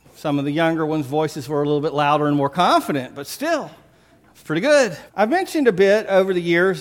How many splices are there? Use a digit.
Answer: 1